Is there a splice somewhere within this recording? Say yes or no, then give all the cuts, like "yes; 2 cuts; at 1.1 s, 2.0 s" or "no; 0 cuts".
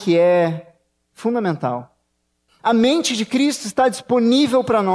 yes; 1 cut; at 2.5 s